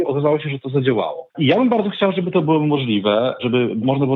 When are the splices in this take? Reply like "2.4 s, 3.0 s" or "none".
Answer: 1.3 s